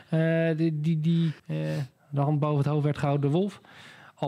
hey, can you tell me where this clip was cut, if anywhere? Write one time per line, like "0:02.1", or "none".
0:01.4